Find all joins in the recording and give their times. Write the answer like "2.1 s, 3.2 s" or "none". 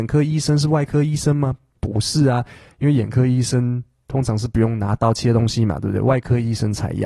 none